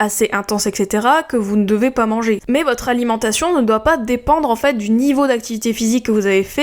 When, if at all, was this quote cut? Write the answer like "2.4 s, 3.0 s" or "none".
2.4 s

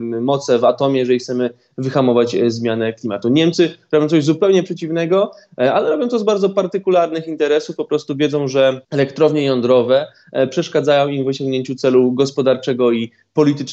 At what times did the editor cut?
8.8 s

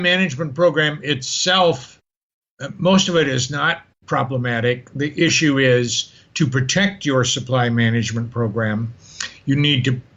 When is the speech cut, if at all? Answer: none

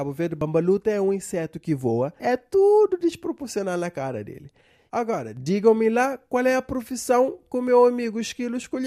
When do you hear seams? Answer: 2.2 s

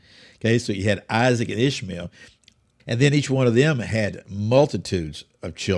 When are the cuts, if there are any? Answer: 2.8 s

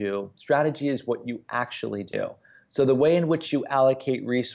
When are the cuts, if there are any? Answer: none

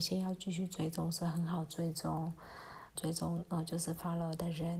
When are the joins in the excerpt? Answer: 2.9 s

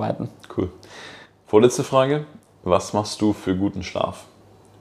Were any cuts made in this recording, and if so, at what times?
none

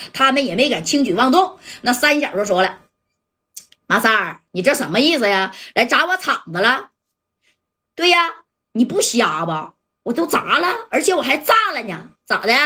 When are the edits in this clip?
none

